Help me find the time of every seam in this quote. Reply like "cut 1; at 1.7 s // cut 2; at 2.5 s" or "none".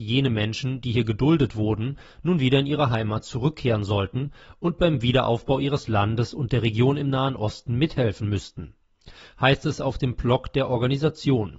none